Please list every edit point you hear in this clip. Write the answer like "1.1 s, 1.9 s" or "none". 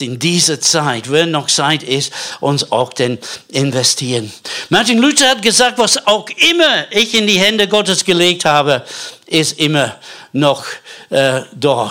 none